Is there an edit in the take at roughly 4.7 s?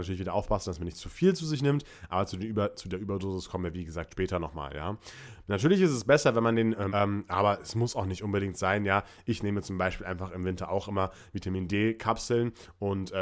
no; 1 cut; at 6.9 s

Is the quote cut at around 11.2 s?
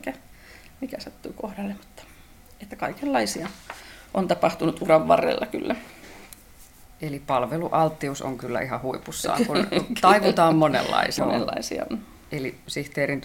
yes; 1 cut; at 11.2 s

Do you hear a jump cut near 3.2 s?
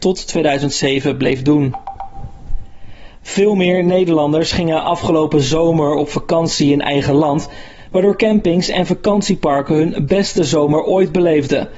no; 0 cuts

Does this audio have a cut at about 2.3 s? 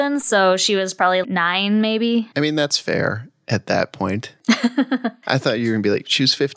yes; 2 cuts; at 1.2 s, 2.3 s

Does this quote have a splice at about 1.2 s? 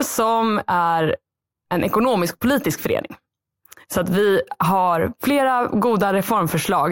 no; 0 cuts

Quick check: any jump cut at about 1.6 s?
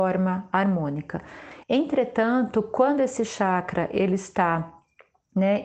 yes; 1 cut; at 1.6 s

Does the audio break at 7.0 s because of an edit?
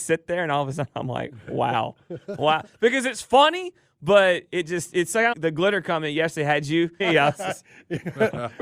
yes; 2 cuts; at 5.3 s, 7.0 s

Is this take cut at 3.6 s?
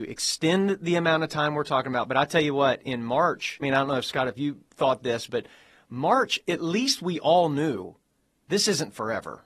yes; 1 cut; at 3.6 s

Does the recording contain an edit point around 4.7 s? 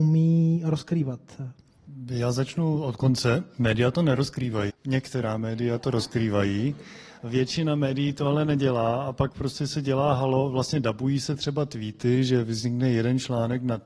yes; 1 cut; at 4.7 s

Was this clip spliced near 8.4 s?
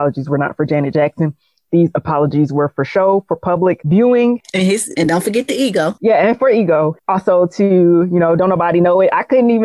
yes; 1 cut; at 8.4 s

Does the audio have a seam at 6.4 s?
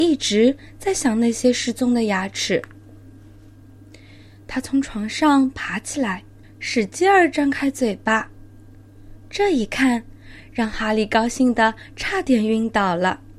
yes; 1 cut; at 6.4 s

